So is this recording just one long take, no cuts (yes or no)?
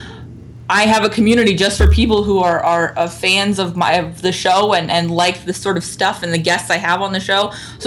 yes